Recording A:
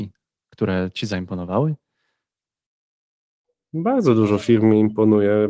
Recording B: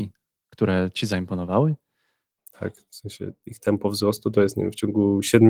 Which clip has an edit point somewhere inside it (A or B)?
B